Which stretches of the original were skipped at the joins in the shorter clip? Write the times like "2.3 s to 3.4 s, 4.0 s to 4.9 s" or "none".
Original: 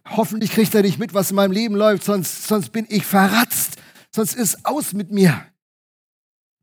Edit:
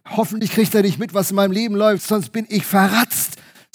2.0 s to 2.4 s